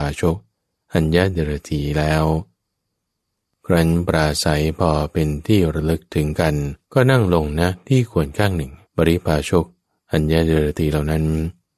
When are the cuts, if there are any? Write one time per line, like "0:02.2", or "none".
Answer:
0:06.8
0:08.8